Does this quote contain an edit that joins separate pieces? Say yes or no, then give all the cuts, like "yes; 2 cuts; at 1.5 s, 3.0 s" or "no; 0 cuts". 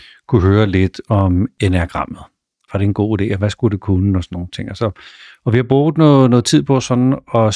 yes; 1 cut; at 2.7 s